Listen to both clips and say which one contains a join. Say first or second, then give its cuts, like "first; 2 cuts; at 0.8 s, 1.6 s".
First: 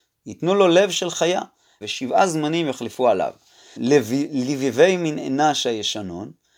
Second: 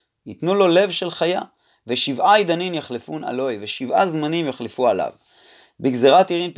first; 2 cuts; at 1.8 s, 3.8 s